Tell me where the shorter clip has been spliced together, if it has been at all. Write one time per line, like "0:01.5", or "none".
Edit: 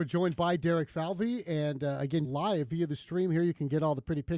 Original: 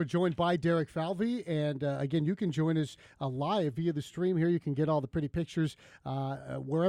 0:02.2